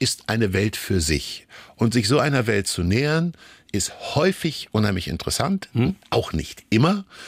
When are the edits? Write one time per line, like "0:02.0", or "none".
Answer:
none

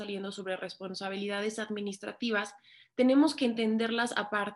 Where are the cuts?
none

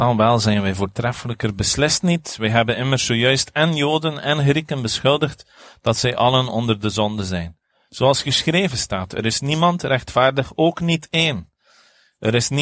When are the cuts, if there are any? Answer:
none

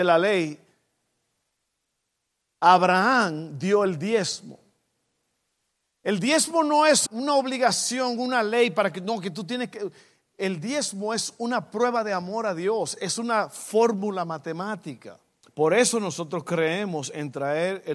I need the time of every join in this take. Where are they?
0:07.1
0:15.4

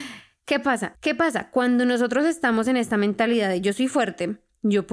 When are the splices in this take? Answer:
0:00.9

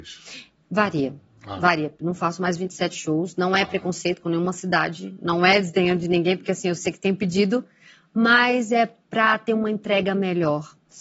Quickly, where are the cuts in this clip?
none

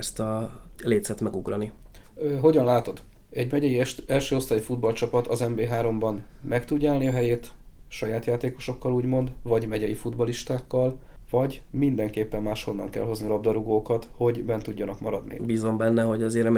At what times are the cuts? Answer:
0:15.4

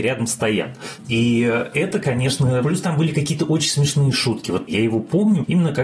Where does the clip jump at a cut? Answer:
0:02.6

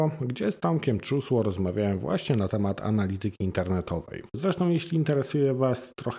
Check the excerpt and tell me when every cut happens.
0:04.3

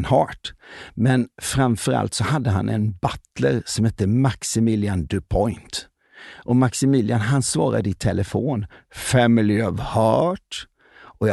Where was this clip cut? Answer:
none

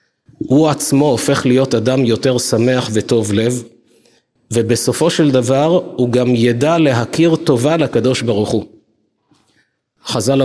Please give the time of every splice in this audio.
none

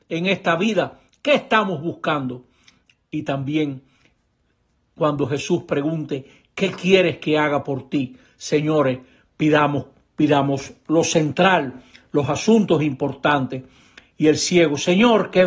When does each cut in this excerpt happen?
none

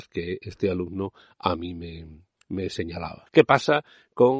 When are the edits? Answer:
0:03.3

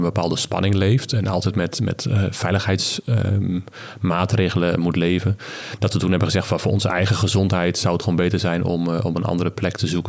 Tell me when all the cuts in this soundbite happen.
none

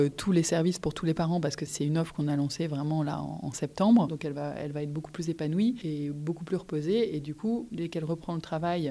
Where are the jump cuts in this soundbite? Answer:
0:04.1

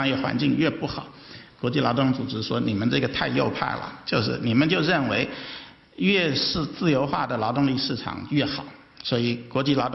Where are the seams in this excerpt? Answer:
0:01.6

